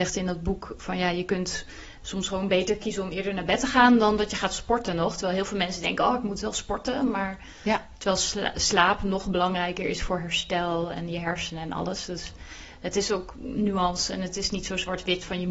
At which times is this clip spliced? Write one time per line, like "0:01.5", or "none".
none